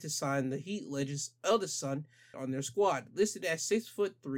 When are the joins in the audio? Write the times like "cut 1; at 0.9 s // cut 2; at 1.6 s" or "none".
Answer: cut 1; at 2.3 s